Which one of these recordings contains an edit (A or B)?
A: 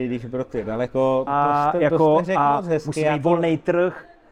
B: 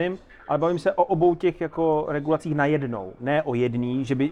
A